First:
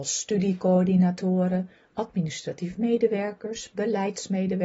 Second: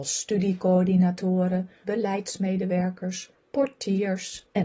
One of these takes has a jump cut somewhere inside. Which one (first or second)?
second